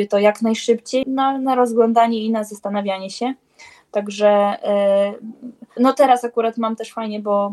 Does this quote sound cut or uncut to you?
cut